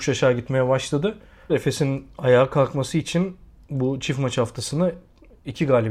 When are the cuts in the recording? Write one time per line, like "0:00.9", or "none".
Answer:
0:01.5